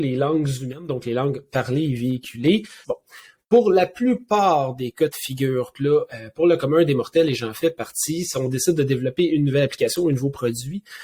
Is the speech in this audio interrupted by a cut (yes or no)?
yes